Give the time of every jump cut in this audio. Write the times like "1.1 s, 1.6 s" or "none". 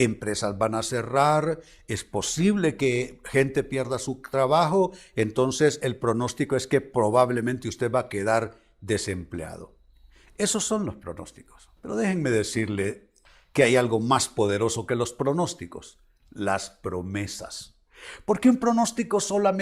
11.8 s